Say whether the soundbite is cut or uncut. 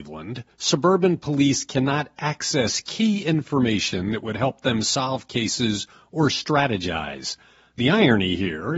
uncut